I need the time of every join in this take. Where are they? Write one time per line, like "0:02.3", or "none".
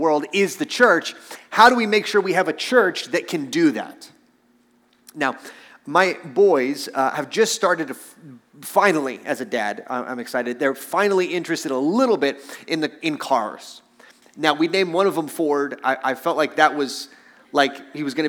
none